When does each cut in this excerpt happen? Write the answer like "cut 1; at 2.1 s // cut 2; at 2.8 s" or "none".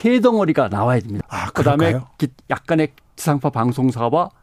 cut 1; at 1.2 s